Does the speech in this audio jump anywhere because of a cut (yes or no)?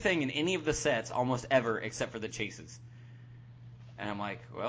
no